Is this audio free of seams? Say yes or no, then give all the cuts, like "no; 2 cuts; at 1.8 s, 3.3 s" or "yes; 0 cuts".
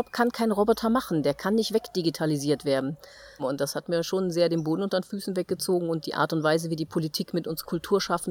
no; 1 cut; at 3.4 s